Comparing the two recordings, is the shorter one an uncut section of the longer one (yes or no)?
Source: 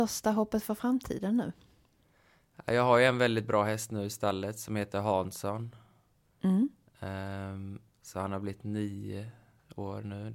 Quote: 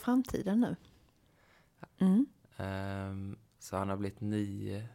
no